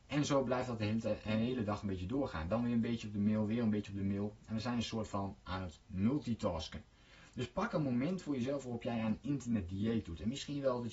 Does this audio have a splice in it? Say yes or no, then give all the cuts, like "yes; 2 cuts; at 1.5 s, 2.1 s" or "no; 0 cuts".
no; 0 cuts